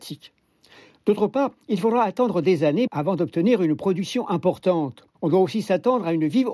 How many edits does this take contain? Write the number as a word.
one